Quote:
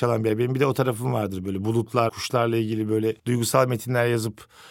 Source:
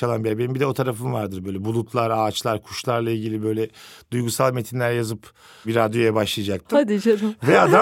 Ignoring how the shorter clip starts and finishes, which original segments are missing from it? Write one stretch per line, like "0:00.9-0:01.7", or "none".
0:02.1-0:02.6
0:03.7-0:04.0